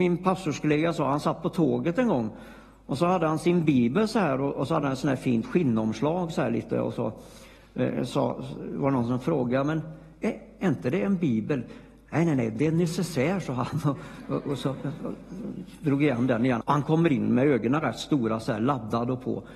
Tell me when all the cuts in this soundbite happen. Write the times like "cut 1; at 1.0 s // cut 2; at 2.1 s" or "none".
cut 1; at 16.6 s

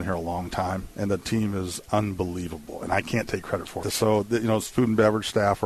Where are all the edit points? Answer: cut 1; at 3.8 s

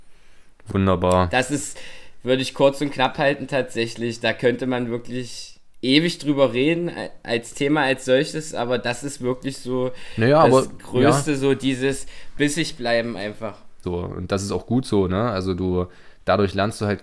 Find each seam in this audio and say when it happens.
cut 1; at 13.8 s

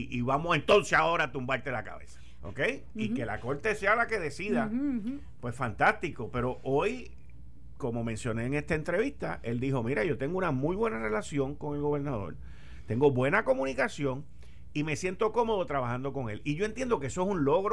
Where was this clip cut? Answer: cut 1; at 2.4 s

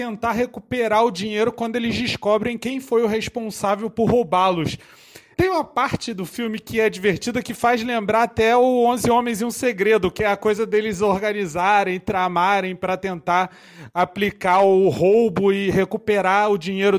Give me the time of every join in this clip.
cut 1; at 5.3 s

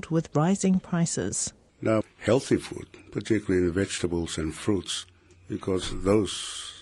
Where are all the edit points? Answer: cut 1; at 2.0 s

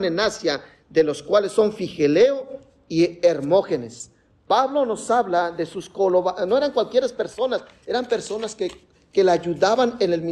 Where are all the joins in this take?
none

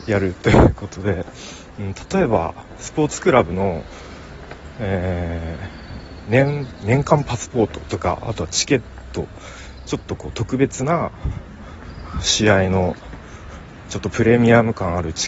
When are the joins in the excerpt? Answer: none

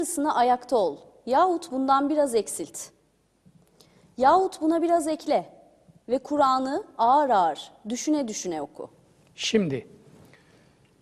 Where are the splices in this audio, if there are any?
none

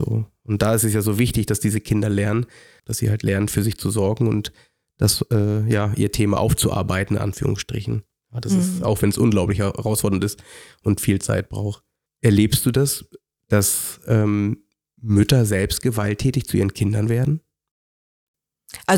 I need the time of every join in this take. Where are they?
cut 1; at 2.8 s

